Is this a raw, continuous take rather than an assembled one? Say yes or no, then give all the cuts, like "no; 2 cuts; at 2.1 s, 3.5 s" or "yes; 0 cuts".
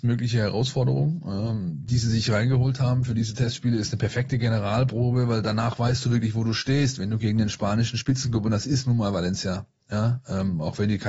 yes; 0 cuts